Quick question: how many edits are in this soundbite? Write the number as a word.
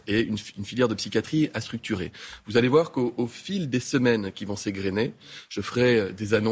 zero